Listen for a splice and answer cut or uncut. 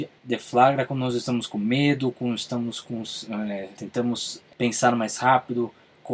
cut